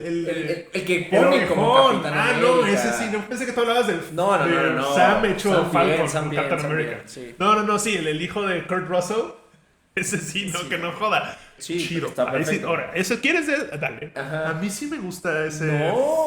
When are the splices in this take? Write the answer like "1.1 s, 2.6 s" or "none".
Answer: 11.6 s, 14.1 s